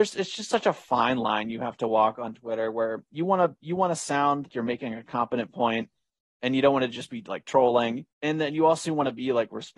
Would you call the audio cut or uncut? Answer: cut